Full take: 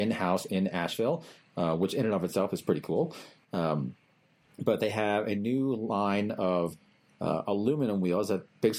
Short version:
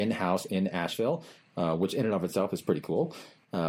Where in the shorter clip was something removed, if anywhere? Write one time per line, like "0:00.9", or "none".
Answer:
none